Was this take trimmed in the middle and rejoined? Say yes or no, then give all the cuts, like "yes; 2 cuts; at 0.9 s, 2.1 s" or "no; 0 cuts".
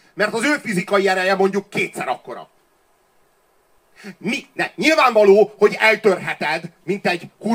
no; 0 cuts